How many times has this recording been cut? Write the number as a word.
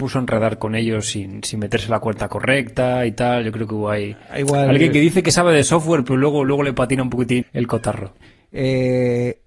one